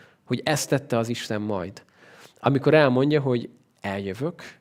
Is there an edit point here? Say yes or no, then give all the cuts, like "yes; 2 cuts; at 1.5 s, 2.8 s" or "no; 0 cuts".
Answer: no; 0 cuts